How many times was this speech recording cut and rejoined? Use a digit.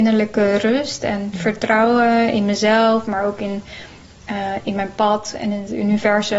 0